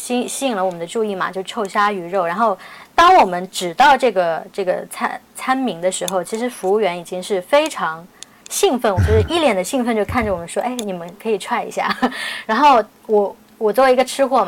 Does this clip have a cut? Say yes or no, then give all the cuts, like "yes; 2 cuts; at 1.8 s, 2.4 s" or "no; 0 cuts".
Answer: yes; 1 cut; at 9.0 s